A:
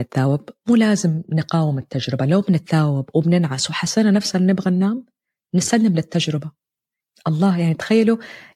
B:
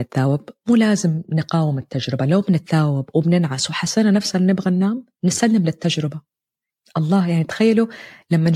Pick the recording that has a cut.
B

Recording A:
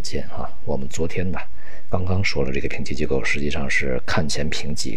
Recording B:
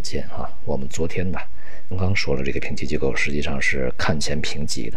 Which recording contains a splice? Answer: B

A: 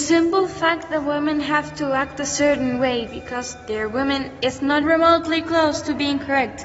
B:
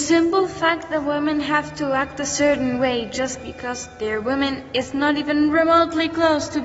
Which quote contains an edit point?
A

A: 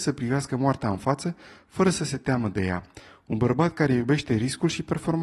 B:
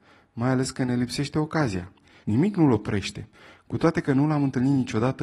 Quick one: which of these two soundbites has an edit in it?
B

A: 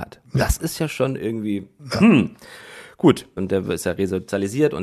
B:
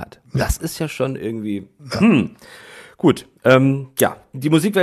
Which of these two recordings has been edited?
A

